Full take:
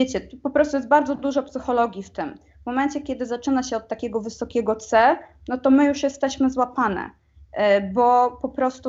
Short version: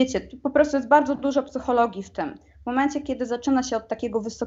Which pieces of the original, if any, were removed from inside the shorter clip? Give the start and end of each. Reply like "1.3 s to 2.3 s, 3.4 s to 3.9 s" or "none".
none